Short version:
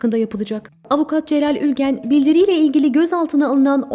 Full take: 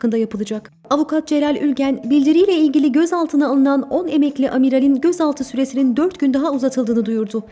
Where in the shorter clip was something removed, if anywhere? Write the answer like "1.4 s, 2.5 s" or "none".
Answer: none